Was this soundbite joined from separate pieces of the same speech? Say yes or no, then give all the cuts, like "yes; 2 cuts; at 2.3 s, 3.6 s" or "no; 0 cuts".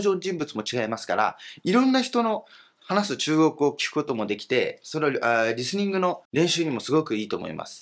no; 0 cuts